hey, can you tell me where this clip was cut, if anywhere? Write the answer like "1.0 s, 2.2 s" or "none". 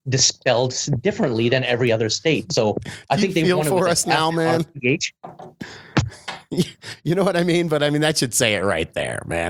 none